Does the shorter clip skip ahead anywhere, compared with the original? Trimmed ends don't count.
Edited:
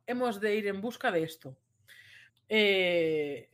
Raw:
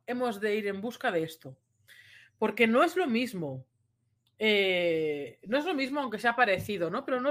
yes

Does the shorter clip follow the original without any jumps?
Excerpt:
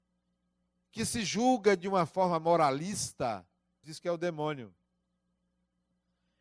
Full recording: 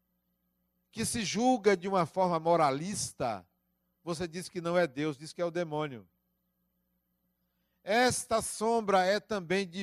no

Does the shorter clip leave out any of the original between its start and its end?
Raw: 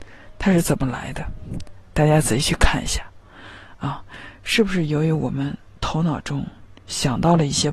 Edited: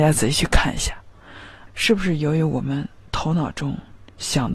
yes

